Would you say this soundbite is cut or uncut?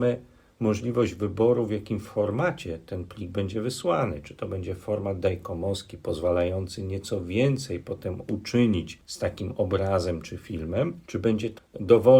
uncut